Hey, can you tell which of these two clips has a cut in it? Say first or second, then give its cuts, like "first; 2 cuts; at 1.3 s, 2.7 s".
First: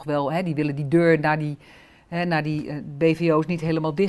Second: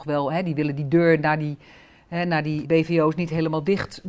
second; 1 cut; at 2.6 s